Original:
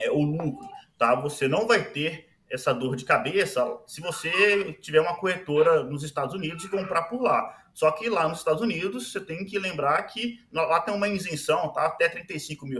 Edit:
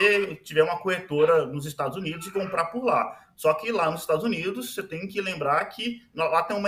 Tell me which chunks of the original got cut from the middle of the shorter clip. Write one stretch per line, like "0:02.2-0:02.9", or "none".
none